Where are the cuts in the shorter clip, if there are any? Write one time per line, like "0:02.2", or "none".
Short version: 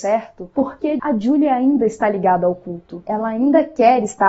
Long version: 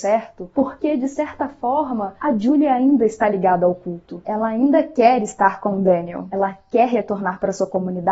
0:01.0